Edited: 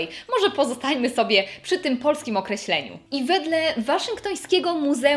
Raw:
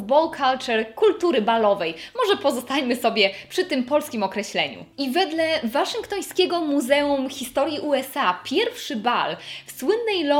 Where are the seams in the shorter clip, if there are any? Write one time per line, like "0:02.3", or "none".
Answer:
none